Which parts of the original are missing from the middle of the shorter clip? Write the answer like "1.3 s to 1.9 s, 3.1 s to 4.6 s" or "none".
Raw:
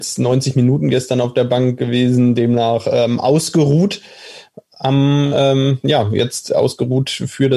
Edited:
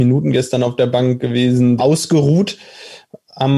2.4 s to 3.2 s